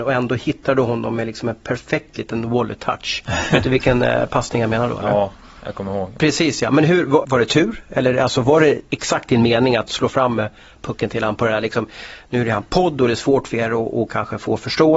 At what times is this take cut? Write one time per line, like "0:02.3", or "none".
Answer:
0:06.2
0:07.2